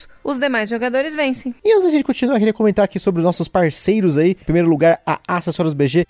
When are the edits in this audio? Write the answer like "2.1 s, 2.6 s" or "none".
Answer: none